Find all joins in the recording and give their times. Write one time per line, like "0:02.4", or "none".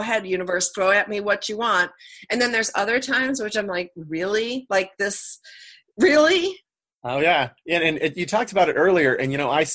none